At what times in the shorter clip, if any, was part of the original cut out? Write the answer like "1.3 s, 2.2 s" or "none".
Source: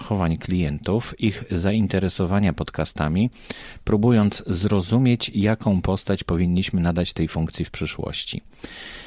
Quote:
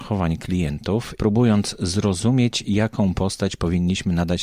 1.2 s